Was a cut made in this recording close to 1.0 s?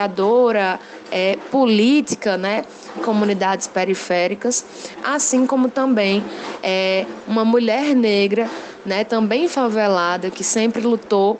no; 1 cut; at 3.0 s

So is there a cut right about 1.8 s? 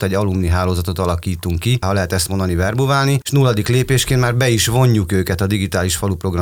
yes; 1 cut; at 1.8 s

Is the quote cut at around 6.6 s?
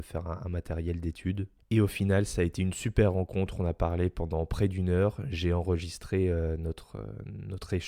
no; 0 cuts

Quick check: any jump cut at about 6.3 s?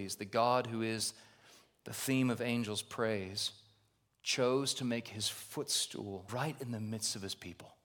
yes; 1 cut; at 6.3 s

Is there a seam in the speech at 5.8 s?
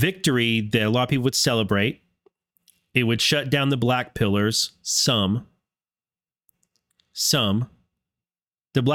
no; 0 cuts

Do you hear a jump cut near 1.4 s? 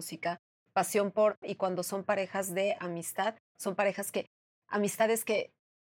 yes; 1 cut; at 1.4 s

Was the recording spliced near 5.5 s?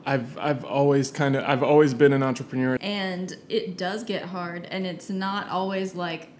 no; 1 cut; at 2.8 s

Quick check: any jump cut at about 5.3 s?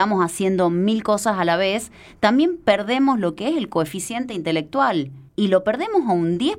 yes; 1 cut; at 5.3 s

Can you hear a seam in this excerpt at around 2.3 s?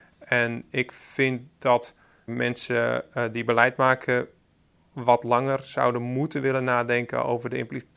yes; 1 cut; at 2.3 s

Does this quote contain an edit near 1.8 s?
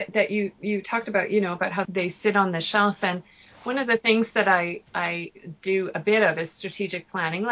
yes; 1 cut; at 1.8 s

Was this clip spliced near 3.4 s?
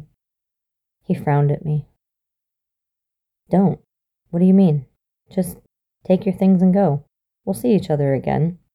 no; 1 cut; at 5.3 s

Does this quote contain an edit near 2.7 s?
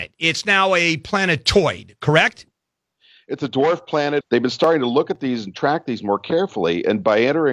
no; 1 cut; at 4.2 s

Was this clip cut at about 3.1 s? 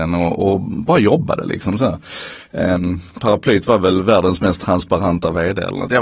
no; 0 cuts

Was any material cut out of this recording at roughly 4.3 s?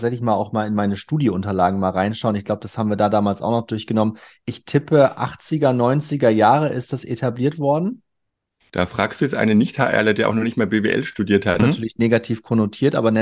no; 1 cut; at 11.6 s

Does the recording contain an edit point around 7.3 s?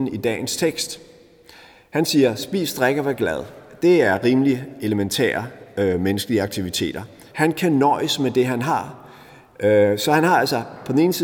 yes; 1 cut; at 7.3 s

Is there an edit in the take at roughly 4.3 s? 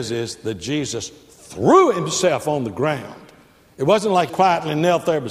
yes; 1 cut; at 4.3 s

